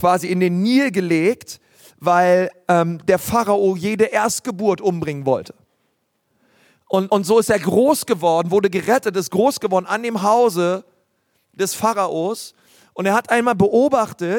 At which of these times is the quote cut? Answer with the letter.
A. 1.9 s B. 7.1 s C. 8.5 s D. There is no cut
B